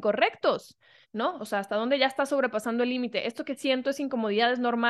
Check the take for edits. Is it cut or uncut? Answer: cut